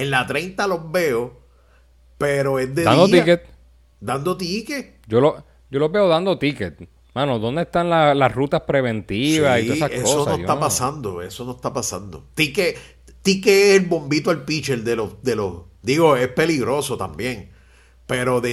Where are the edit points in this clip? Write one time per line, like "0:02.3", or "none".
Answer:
none